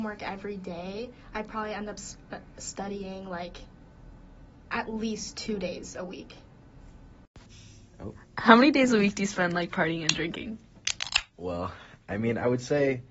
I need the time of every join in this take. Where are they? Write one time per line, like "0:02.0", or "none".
0:11.3